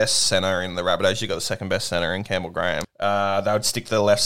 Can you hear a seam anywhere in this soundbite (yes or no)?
yes